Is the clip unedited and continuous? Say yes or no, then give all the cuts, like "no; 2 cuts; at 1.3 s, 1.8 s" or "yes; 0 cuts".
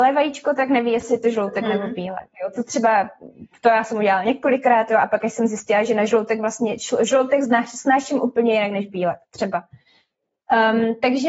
yes; 0 cuts